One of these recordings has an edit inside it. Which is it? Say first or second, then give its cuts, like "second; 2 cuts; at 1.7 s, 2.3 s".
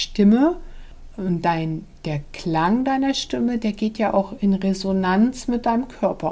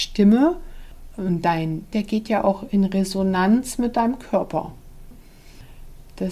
second; 1 cut; at 1.9 s